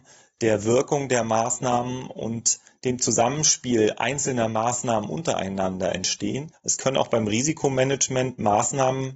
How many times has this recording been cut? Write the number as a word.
one